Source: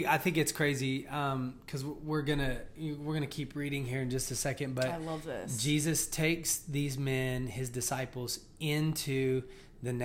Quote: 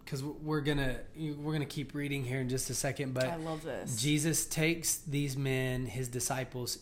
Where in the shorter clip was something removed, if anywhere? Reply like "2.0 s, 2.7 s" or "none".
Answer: none